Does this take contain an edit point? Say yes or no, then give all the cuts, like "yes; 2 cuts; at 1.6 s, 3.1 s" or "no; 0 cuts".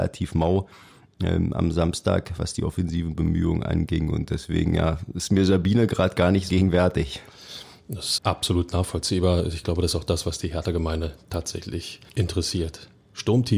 yes; 3 cuts; at 6.5 s, 8.2 s, 12.1 s